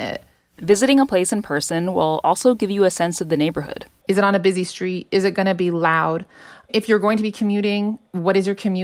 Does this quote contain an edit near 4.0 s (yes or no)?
yes